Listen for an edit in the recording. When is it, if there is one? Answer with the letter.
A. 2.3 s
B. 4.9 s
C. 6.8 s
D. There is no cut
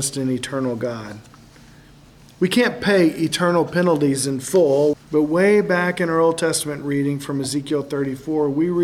B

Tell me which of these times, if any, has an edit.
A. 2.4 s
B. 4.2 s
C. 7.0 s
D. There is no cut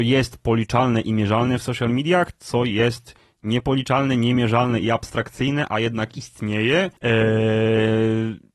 C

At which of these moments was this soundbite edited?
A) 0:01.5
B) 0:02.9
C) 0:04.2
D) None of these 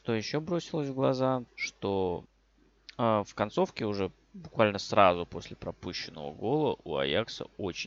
A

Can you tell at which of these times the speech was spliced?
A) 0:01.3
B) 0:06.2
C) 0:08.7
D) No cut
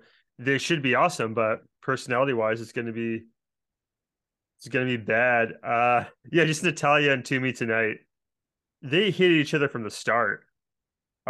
B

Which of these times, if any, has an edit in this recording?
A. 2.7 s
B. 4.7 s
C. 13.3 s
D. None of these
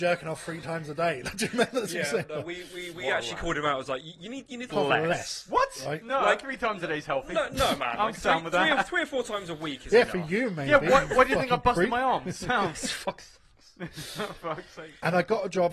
B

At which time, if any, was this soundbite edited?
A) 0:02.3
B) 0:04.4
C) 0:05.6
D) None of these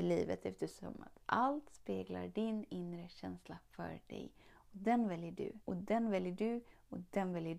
C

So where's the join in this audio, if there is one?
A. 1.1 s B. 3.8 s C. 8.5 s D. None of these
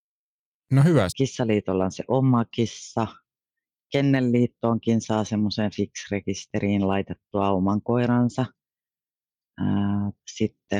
A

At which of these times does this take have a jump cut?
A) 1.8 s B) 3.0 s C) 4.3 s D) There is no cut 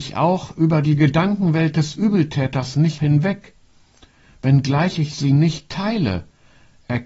B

